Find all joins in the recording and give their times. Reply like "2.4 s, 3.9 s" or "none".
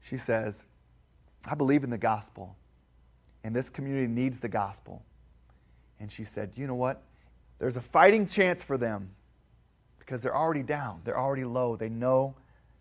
7.4 s